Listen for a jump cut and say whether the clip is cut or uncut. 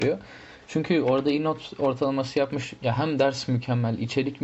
uncut